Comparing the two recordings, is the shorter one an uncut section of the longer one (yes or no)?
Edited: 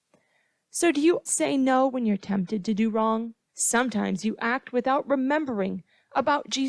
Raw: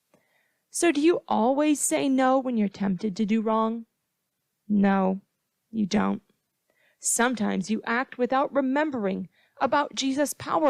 no